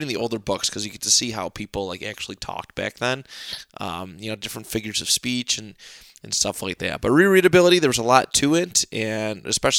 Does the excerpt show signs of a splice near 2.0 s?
no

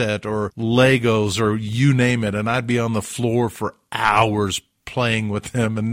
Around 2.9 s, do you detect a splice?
no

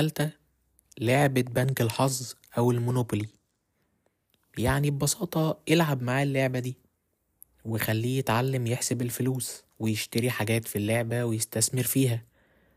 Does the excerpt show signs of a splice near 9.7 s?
yes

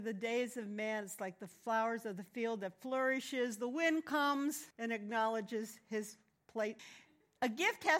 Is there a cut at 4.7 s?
yes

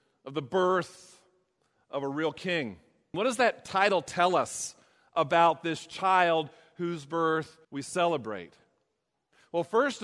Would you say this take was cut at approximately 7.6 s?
yes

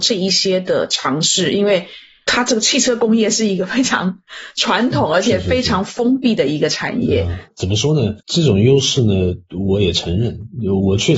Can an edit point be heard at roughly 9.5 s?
no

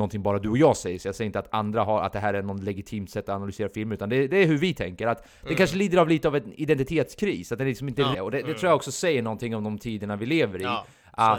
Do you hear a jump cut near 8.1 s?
yes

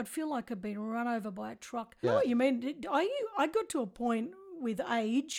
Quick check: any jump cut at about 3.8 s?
no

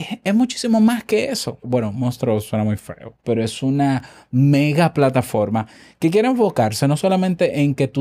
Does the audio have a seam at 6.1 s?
no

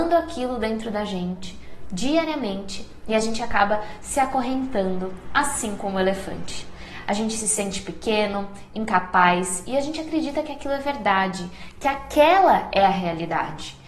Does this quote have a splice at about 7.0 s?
no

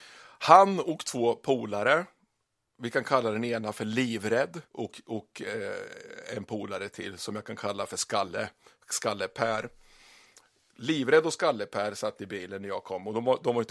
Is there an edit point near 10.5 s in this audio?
no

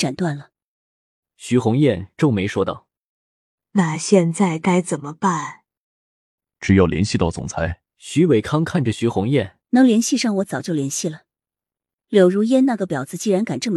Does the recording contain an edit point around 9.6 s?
yes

